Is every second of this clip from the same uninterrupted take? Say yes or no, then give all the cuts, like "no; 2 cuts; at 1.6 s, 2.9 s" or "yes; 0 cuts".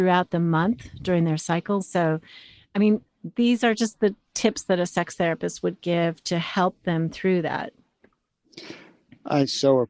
no; 1 cut; at 1.8 s